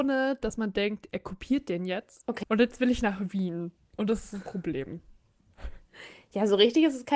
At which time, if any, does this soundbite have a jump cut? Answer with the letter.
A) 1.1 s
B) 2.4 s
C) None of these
B